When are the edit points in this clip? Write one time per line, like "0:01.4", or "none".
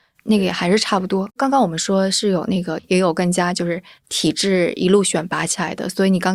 0:01.3
0:02.8